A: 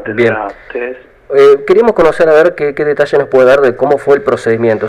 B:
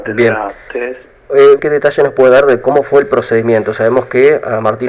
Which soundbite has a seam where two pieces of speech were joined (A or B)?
B